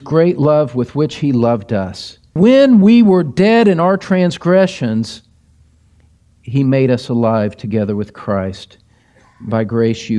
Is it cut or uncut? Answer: cut